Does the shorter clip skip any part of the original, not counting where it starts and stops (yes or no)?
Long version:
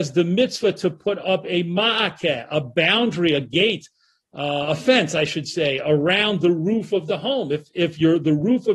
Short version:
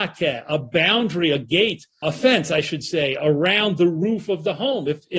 yes